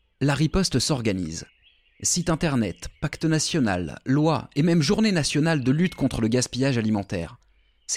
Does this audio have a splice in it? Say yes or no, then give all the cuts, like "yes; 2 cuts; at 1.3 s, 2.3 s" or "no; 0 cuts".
no; 0 cuts